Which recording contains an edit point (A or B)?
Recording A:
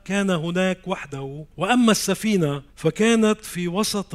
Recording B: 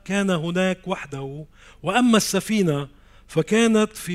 A